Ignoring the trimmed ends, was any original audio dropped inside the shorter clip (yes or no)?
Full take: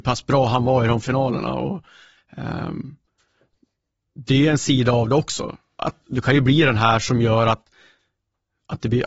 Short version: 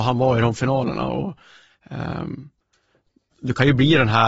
yes